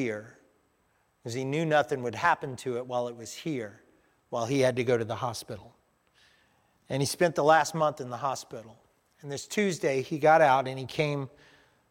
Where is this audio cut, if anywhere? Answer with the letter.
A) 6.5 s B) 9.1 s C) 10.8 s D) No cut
D